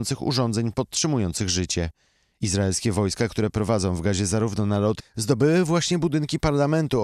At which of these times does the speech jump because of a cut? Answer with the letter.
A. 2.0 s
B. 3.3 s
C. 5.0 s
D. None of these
C